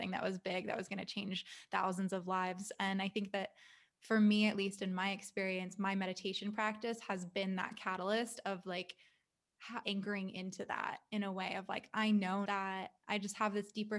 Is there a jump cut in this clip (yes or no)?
yes